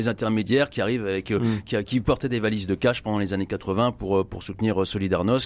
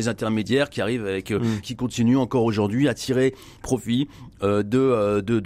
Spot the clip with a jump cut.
second; 1 cut; at 1.6 s

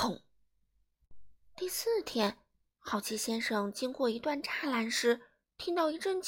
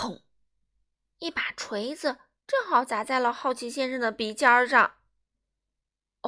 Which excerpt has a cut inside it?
first; 1 cut; at 1.0 s

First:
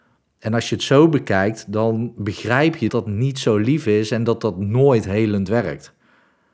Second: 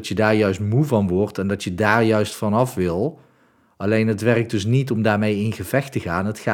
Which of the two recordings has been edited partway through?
first; 1 cut; at 2.9 s

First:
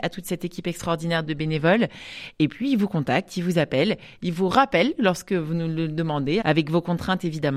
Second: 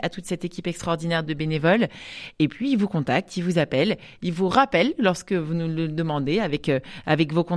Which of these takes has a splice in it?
first; 1 cut; at 6.4 s

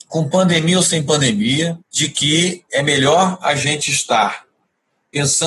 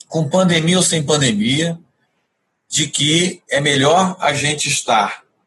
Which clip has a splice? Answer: first; 1 cut; at 1.8 s

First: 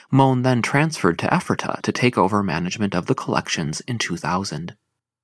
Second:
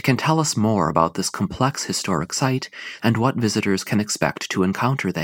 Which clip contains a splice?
second; 1 cut; at 3.0 s

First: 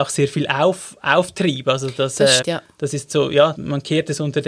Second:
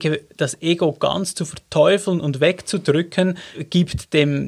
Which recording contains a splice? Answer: first; 2 cuts; at 2.4 s, 3.5 s

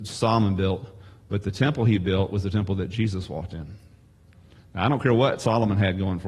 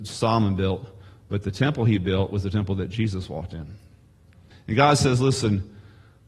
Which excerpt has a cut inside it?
second; 1 cut; at 4.5 s

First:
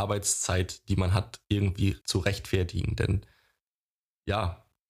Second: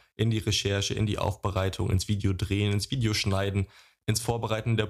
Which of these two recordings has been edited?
first; 1 cut; at 2.0 s

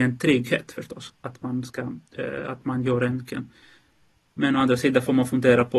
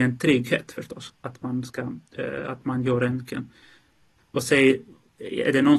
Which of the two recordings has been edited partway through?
second; 1 cut; at 4.2 s

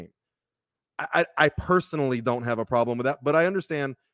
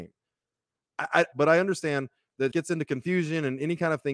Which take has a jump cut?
second; 2 cuts; at 1.3 s, 2.5 s

